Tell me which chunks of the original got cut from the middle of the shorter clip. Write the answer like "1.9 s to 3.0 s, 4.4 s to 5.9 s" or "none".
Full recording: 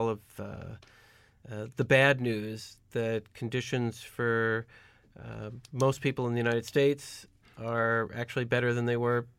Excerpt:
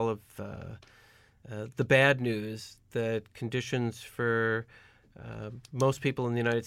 none